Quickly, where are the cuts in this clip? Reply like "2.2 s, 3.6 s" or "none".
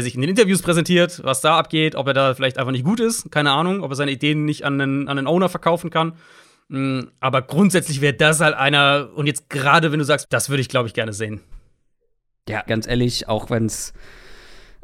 10.2 s, 12.7 s